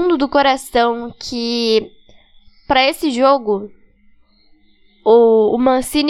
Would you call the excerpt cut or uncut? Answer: uncut